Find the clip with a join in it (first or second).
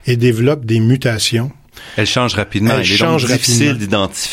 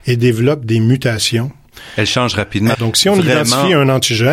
second